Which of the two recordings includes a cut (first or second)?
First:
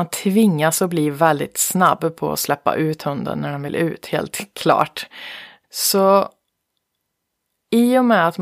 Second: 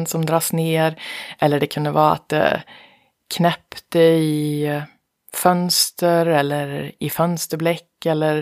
first